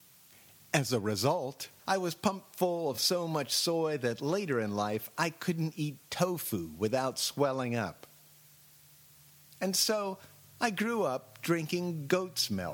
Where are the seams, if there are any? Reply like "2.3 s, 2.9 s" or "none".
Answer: none